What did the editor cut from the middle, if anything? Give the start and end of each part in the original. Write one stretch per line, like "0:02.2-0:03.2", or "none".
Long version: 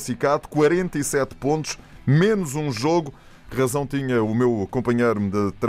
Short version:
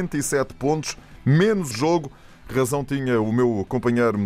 0:02.5-0:02.7

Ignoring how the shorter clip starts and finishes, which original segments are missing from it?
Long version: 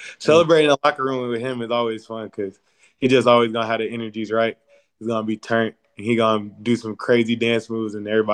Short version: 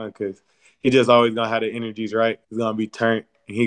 0:04.6-0:04.9

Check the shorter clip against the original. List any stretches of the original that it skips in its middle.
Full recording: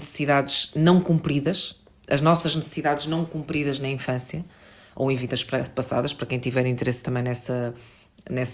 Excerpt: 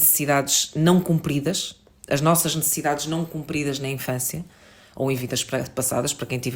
none

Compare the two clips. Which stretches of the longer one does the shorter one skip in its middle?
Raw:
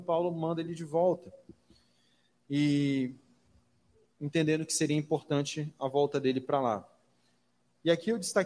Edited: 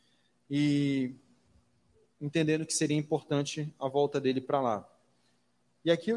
none

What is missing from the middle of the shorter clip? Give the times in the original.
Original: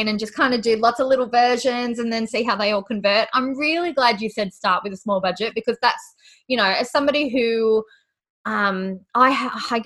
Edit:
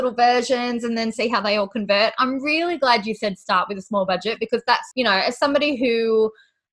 0:06.1-0:06.4

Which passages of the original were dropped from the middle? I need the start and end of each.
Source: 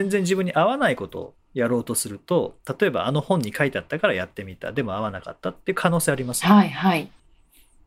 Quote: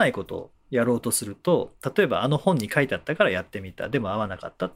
none

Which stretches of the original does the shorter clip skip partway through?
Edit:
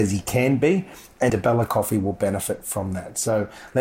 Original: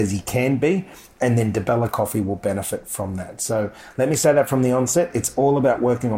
0:01.3-0:01.5

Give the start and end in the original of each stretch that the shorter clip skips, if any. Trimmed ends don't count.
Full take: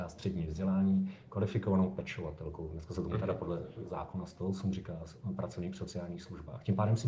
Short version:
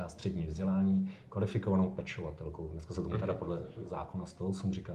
none

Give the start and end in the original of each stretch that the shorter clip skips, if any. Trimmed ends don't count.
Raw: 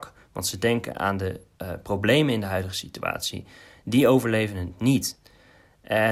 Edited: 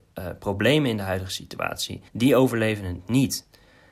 0:03.5-0:03.8

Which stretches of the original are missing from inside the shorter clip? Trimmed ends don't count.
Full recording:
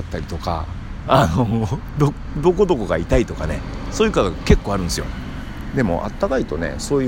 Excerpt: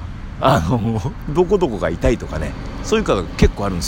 0:01.9-0:02.3

